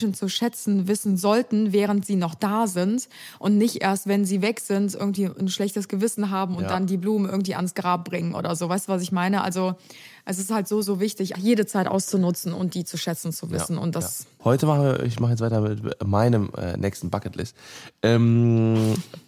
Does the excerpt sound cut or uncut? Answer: cut